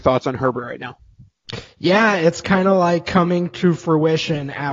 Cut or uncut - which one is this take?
uncut